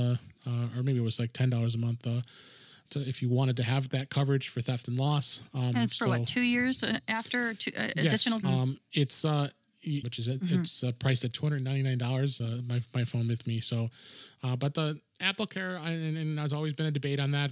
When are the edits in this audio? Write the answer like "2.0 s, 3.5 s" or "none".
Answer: 8.4 s, 10.0 s, 12.4 s